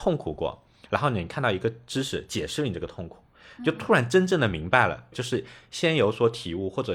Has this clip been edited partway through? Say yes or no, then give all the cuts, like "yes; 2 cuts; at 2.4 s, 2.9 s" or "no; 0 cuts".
yes; 1 cut; at 5.1 s